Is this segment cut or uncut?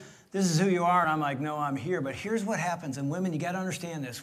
uncut